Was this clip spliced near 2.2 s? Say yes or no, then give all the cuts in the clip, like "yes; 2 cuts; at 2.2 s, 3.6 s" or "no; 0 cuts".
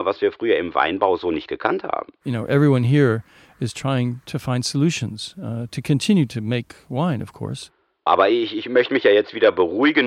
no; 1 cut; at 8.1 s